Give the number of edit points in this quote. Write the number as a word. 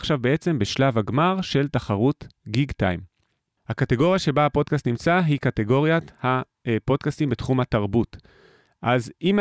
one